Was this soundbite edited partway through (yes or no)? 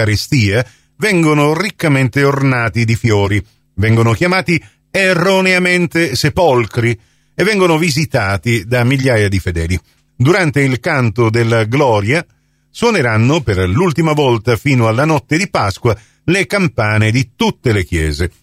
yes